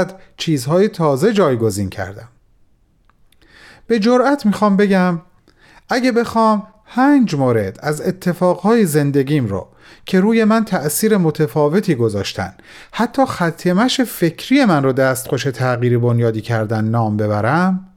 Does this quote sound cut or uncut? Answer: uncut